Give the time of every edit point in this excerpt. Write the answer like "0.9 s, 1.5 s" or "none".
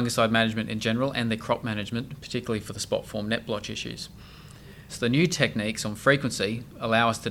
4.9 s